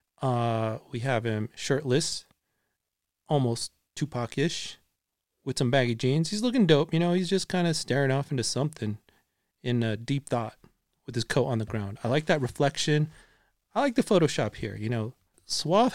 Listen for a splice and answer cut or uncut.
uncut